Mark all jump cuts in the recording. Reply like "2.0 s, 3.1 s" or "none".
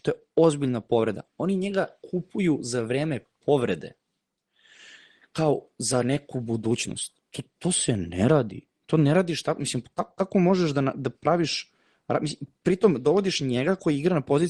none